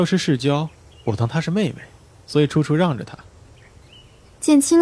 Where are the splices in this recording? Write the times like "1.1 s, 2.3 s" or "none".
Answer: 0.9 s